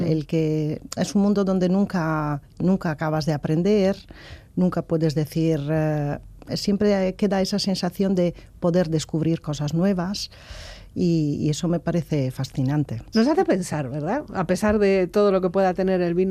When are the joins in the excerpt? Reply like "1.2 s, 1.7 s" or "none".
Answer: 6.5 s, 13.1 s